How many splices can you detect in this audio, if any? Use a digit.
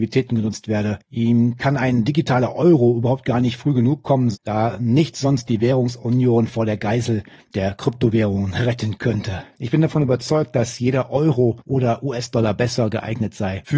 2